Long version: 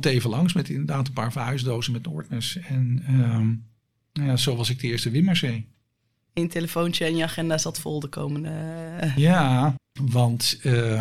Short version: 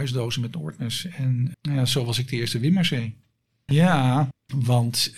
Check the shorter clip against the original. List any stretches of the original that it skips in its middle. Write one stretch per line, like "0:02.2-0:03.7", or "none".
0:03.0-0:04.0
0:06.2-0:09.1